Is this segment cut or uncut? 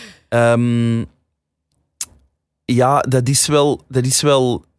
uncut